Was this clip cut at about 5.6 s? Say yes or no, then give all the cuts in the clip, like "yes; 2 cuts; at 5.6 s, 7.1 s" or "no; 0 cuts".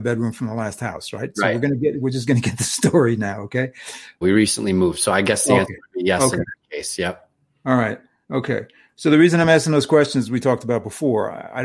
no; 1 cut; at 4.2 s